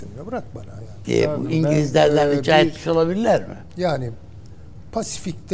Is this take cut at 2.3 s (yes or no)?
no